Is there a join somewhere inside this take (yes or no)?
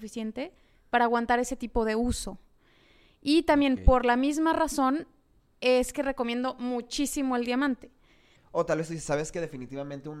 yes